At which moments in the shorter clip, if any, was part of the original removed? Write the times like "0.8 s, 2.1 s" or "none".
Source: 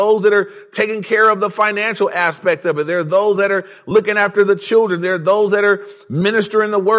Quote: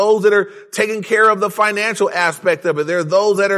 none